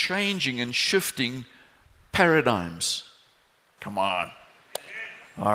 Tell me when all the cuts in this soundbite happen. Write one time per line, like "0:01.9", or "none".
0:03.8